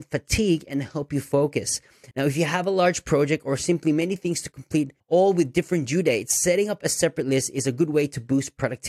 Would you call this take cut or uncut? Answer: cut